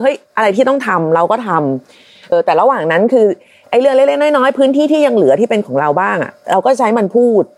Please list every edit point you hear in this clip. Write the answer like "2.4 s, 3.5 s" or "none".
2.3 s